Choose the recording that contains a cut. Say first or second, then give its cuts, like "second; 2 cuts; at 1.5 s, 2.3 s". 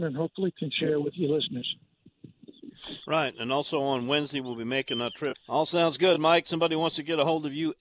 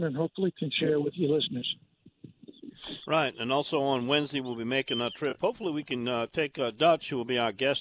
first; 1 cut; at 5.3 s